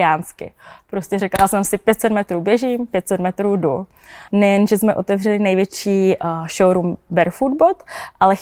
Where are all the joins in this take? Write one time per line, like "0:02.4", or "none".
0:04.3